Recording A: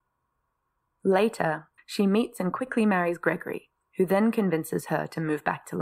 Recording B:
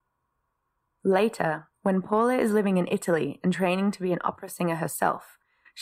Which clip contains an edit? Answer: A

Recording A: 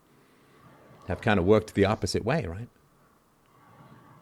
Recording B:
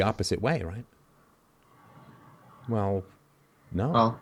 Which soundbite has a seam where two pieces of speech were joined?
B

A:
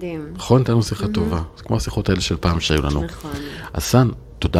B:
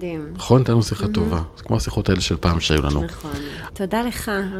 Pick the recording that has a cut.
B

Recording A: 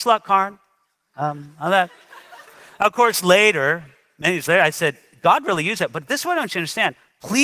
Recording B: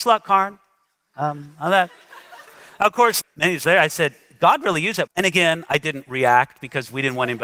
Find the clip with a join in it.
B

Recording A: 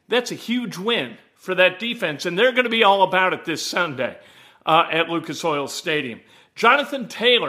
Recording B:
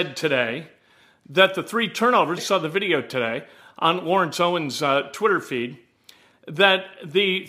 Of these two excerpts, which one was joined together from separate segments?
B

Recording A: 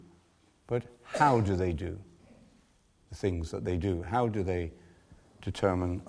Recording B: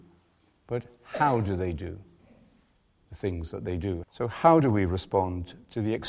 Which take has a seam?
B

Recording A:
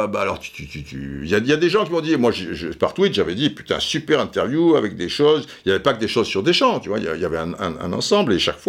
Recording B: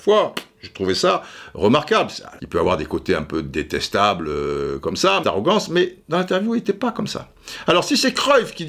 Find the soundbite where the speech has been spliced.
B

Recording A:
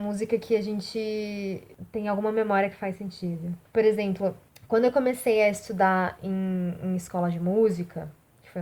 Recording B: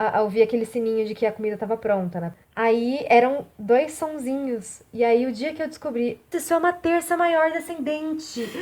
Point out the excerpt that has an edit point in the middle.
B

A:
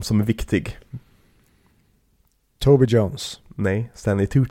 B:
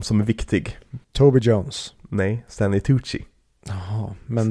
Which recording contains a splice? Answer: B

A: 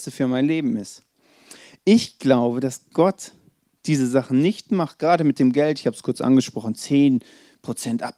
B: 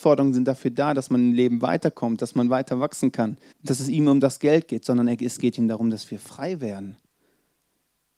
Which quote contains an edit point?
B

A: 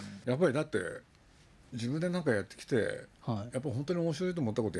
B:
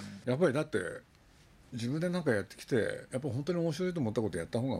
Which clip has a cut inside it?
B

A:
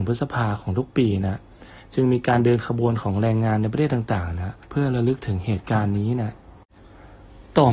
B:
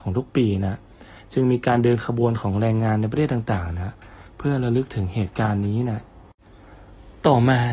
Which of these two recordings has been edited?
A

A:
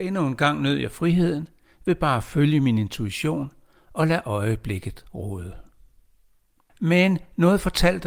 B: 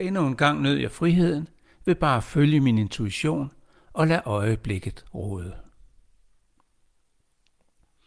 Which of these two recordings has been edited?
A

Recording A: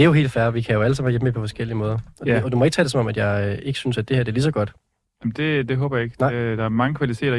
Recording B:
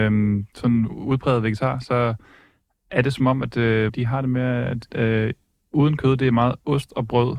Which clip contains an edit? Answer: B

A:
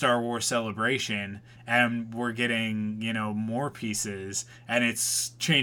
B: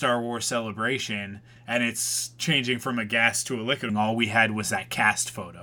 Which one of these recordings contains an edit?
B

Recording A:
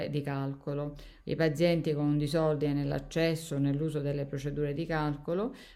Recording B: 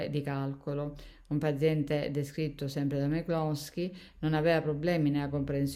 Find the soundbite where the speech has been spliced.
A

